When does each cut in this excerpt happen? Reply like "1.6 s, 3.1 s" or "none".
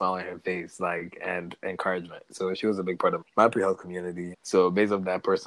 3.2 s, 4.3 s